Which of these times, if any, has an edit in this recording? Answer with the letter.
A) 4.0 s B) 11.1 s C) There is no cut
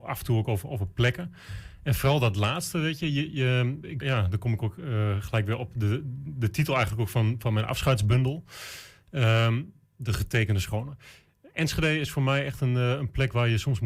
A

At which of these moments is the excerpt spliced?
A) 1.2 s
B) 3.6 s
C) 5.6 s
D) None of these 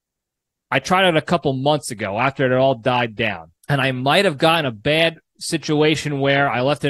B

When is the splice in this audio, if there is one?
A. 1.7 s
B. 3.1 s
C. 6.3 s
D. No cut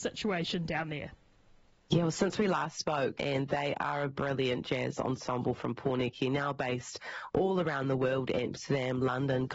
B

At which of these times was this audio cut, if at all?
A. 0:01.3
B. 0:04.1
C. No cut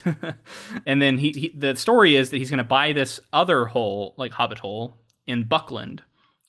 A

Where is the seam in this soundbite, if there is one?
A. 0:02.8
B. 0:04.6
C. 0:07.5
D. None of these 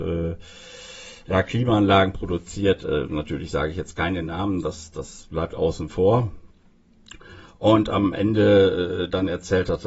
D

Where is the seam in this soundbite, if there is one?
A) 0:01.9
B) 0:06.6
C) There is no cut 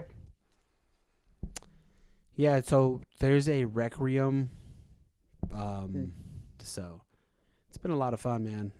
B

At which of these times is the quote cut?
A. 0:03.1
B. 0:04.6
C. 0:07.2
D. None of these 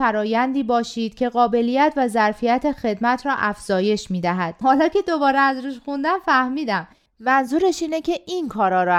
B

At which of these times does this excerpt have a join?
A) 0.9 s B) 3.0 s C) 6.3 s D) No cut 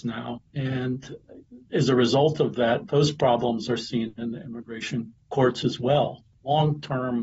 D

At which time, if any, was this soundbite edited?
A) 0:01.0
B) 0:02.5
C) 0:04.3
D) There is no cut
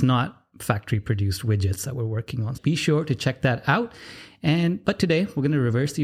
B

